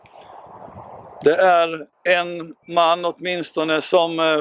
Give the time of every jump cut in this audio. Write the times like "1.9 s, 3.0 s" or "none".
1.9 s